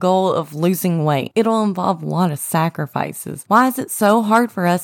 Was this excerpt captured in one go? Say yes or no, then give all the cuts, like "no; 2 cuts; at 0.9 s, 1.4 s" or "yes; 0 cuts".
no; 2 cuts; at 1.3 s, 3.5 s